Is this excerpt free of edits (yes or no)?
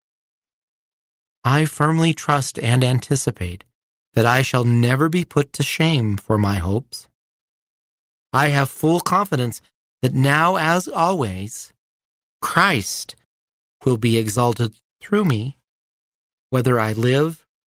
yes